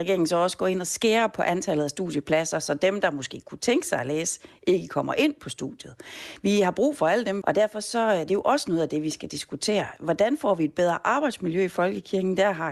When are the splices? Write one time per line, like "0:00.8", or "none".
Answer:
0:07.4